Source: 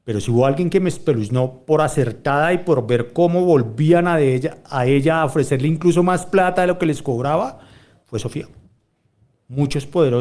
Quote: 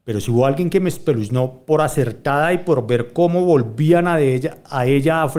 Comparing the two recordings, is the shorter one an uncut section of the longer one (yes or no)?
yes